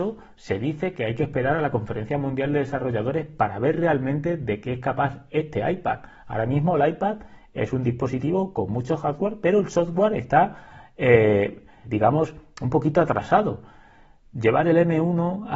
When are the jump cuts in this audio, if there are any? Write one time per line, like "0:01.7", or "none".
0:11.8